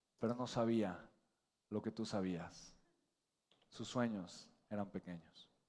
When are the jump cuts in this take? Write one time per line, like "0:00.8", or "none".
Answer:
none